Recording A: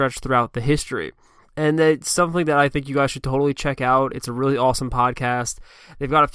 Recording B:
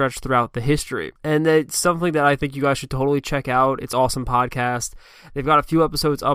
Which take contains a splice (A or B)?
B